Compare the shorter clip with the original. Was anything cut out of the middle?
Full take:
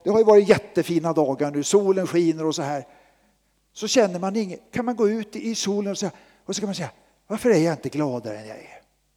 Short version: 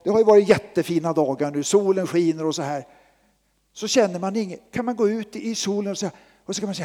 no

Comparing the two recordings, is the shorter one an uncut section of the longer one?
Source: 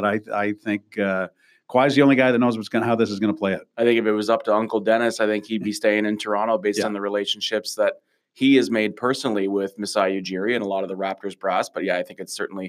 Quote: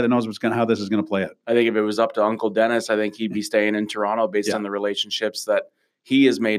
yes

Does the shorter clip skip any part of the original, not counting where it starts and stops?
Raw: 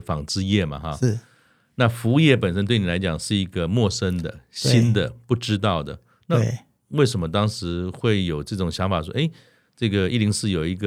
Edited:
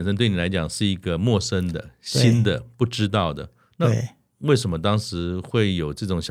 no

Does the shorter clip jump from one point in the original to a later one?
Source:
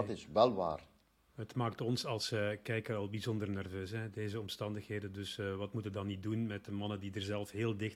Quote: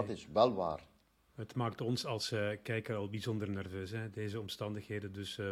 no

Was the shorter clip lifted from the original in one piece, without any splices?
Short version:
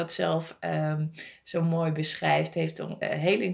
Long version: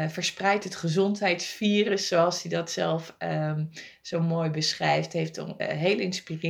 yes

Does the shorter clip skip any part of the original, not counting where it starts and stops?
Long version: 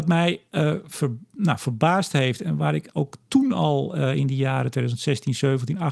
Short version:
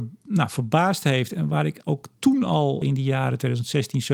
yes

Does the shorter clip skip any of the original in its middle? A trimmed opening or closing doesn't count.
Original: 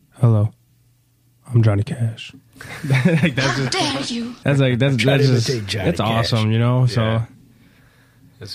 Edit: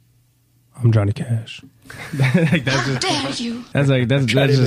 no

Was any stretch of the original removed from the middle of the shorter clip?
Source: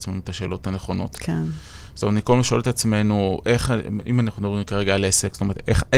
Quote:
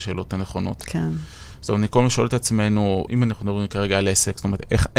yes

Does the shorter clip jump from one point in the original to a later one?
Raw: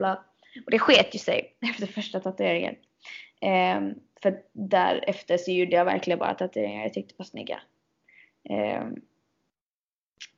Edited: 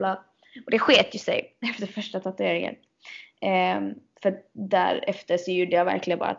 no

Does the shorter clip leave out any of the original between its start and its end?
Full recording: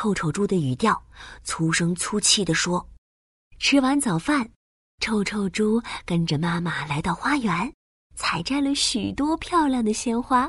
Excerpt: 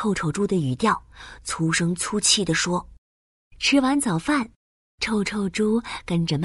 no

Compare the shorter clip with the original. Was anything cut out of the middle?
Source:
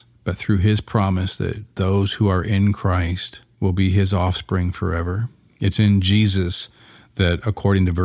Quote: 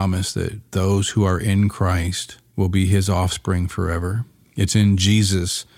no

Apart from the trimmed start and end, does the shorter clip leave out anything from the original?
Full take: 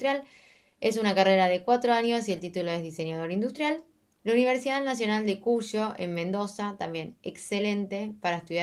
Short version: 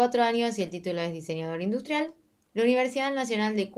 no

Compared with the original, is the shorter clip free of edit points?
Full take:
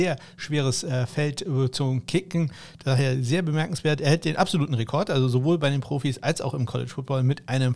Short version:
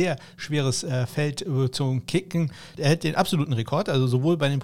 no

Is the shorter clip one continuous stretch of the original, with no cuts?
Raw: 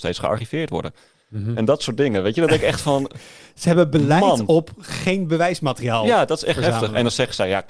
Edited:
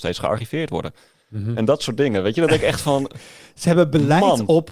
yes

